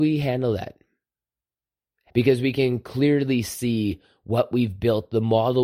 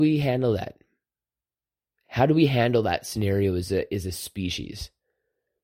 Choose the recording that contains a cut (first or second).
first